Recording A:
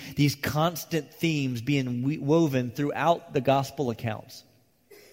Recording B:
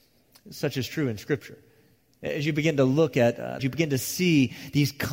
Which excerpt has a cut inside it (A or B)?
B